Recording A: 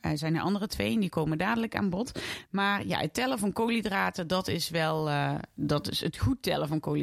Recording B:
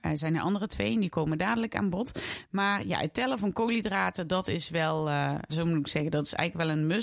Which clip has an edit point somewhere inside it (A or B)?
B